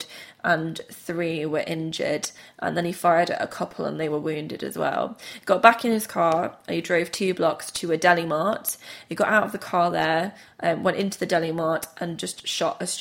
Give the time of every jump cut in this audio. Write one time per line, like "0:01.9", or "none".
none